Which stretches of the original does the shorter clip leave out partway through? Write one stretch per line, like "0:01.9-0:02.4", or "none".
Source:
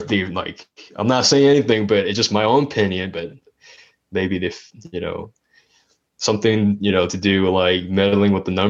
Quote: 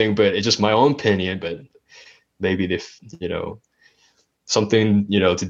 none